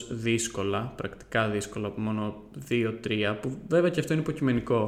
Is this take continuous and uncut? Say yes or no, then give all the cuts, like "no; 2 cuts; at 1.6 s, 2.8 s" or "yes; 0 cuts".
yes; 0 cuts